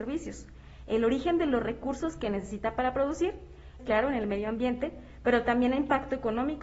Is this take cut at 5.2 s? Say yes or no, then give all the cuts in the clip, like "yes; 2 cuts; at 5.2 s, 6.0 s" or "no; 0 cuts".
no; 1 cut; at 3.8 s